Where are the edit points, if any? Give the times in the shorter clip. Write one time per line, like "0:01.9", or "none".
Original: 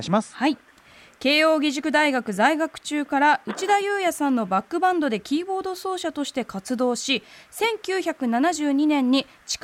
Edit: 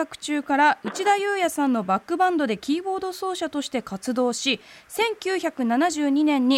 none